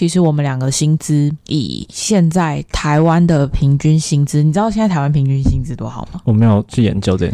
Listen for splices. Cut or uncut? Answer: uncut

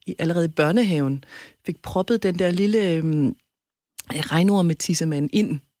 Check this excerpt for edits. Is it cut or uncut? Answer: uncut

